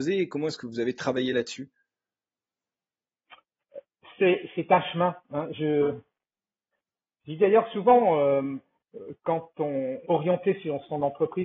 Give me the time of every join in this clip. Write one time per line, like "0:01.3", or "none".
0:10.0